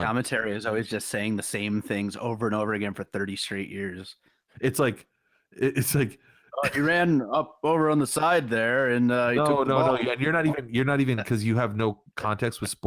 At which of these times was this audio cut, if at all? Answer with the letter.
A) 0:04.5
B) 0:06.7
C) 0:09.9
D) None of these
A